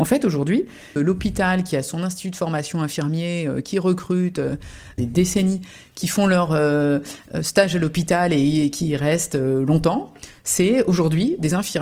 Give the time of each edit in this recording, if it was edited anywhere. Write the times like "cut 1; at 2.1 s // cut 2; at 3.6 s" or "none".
cut 1; at 1.0 s // cut 2; at 5.0 s